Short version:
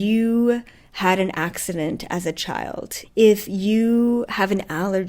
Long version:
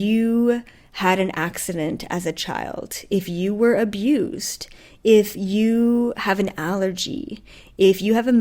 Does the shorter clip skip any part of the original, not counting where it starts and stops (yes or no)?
yes